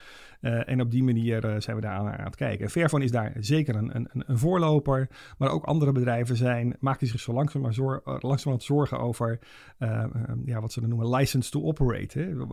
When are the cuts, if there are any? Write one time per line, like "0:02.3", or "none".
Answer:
none